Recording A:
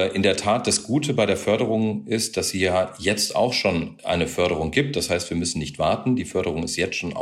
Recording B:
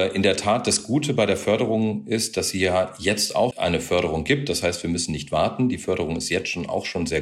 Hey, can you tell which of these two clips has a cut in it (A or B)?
B